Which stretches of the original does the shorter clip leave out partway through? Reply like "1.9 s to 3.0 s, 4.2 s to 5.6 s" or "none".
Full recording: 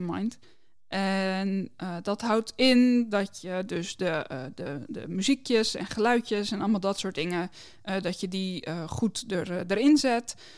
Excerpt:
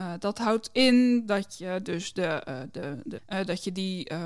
5.0 s to 7.7 s